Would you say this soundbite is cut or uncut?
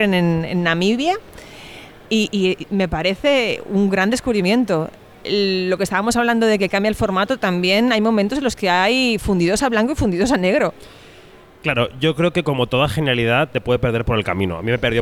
uncut